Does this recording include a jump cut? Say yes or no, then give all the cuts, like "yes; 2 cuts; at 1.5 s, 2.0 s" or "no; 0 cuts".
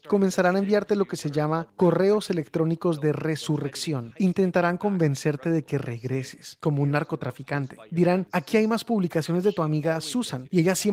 no; 0 cuts